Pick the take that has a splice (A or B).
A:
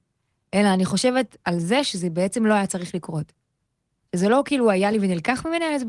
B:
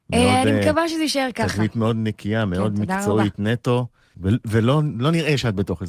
B